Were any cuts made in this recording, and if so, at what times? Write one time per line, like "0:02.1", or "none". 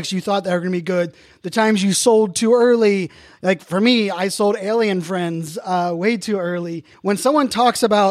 0:06.9